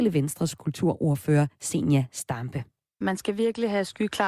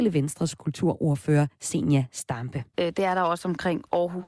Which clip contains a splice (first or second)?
second